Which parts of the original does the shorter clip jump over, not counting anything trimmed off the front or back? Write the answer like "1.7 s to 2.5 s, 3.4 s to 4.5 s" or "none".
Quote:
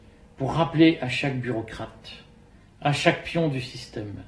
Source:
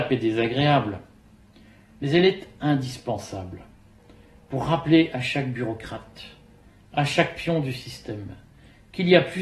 none

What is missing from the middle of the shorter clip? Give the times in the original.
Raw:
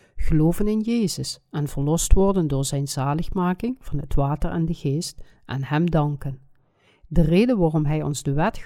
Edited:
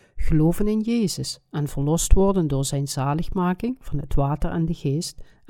none

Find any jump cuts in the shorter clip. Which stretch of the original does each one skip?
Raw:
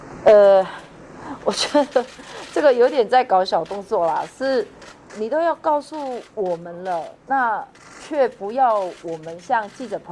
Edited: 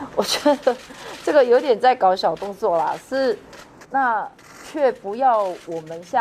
5.1 s to 7.2 s

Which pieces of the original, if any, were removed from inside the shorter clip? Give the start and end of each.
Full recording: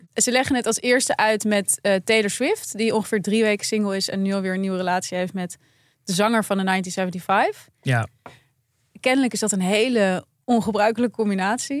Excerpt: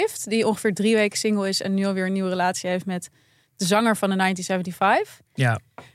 none

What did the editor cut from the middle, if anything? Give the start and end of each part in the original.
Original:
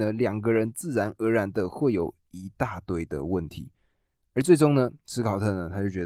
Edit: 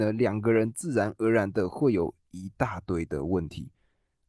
none

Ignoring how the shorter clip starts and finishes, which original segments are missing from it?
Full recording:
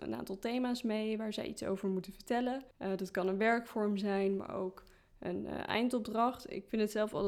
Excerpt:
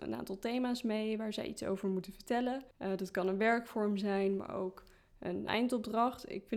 5.5 s to 5.7 s

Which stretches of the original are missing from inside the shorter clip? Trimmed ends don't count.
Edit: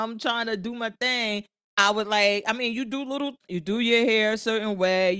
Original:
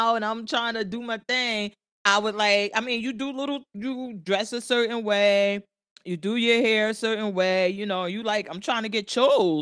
3.7 s to 6.0 s

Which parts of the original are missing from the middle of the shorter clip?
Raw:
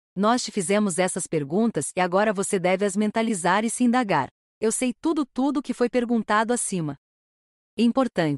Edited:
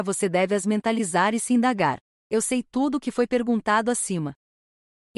4.9 s to 5.3 s

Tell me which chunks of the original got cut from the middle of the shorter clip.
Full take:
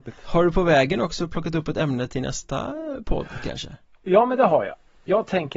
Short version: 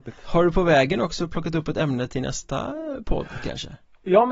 none

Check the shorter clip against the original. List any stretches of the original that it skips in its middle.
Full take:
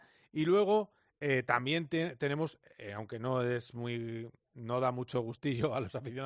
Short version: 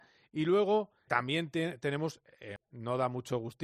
1.1 s to 1.5 s, 2.9 s to 4.4 s

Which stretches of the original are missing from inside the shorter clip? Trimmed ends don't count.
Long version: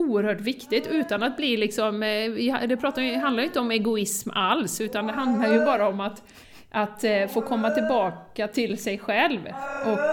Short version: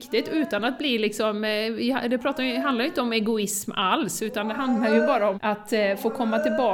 5.9 s to 6.7 s

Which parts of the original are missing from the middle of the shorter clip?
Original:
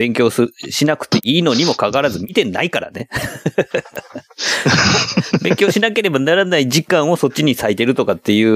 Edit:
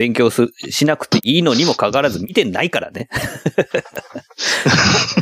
none

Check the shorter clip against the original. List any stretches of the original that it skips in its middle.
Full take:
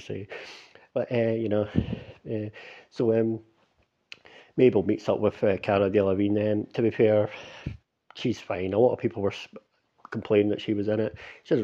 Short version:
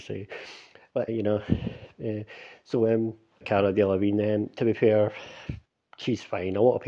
1.1 s to 1.3 s, 3.7 s to 5.6 s

